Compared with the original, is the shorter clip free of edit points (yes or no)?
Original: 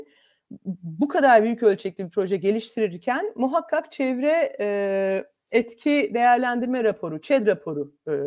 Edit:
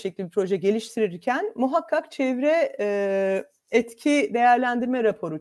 yes